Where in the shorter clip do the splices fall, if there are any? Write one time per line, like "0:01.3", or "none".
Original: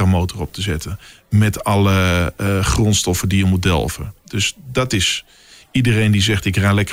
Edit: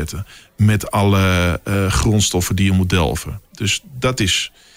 none